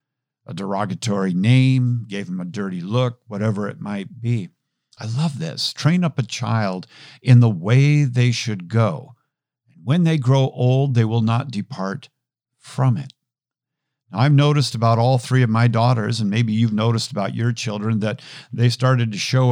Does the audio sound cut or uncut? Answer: cut